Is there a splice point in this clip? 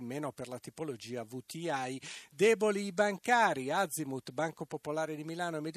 no; 0 cuts

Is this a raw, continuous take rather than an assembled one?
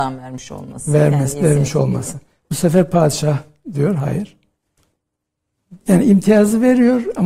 no; 1 cut; at 5.8 s

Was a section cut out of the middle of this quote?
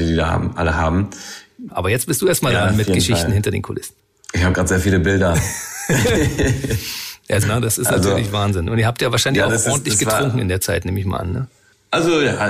yes; 2 cuts; at 1.7 s, 7.4 s

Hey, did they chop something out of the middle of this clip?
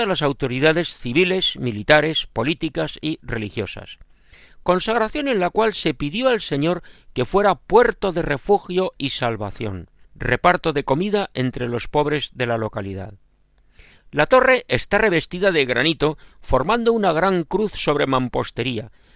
yes; 1 cut; at 10.0 s

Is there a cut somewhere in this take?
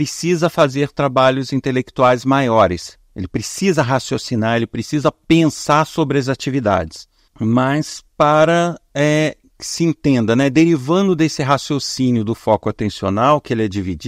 yes; 1 cut; at 7.3 s

